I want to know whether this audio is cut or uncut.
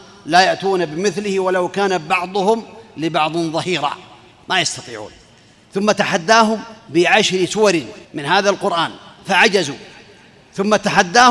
cut